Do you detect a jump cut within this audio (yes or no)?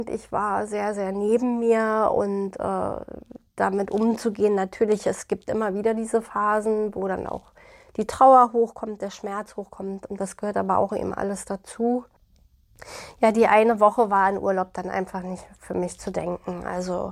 no